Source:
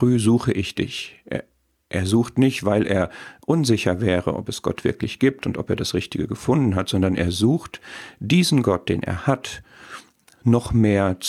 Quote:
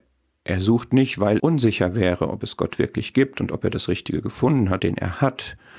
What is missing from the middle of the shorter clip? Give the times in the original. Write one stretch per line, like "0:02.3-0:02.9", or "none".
0:02.8-0:03.4
0:06.9-0:08.9

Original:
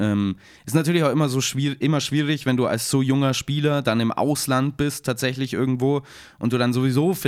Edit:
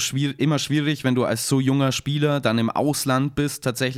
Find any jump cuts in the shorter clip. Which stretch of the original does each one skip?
none

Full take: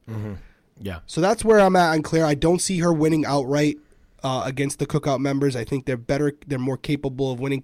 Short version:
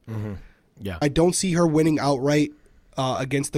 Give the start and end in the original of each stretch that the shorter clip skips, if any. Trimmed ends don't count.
0:01.0-0:02.3

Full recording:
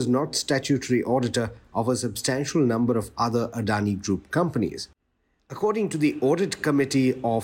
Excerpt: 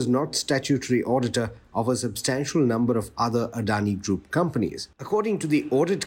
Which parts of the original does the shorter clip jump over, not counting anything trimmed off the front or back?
0:04.9-0:05.4

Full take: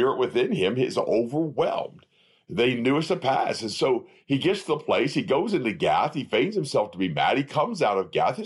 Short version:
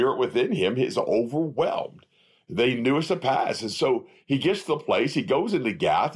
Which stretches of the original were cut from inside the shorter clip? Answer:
none

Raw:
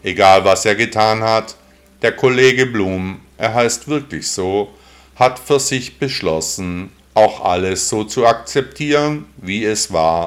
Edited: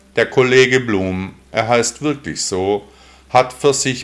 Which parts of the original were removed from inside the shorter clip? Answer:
none

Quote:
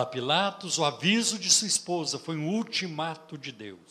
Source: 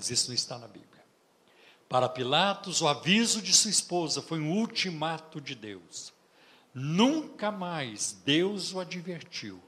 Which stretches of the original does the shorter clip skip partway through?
none

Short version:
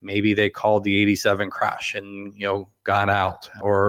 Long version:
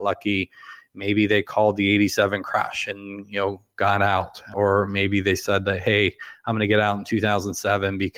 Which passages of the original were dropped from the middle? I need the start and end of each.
none

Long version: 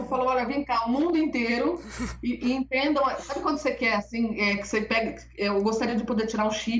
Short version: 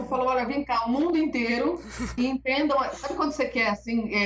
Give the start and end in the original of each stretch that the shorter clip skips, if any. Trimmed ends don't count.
0:02.2-0:02.4

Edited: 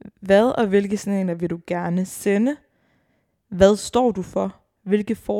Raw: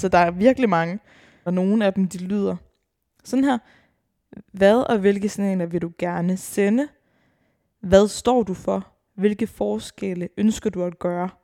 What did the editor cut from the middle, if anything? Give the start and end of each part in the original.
none

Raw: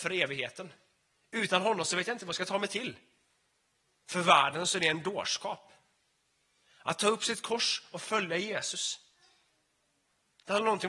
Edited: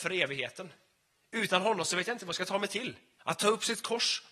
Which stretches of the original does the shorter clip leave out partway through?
0:03.2-0:06.8

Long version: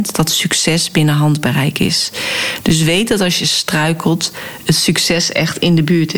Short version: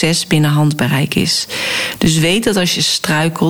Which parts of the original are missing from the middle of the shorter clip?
none

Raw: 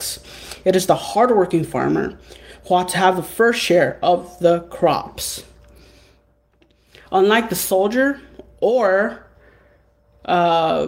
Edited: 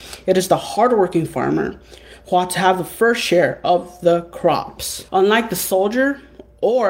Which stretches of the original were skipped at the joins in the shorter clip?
0:05.5-0:07.1

